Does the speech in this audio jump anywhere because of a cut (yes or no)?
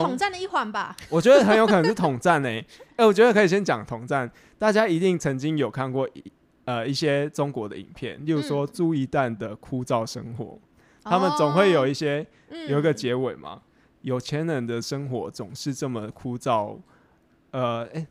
no